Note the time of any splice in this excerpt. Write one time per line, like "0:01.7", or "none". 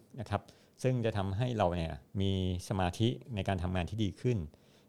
0:02.1